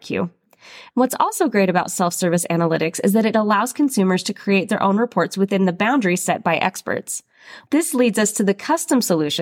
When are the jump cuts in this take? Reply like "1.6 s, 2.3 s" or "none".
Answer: 0.9 s, 7.7 s